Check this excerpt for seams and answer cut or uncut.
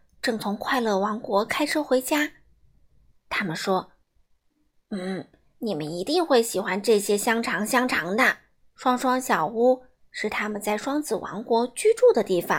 cut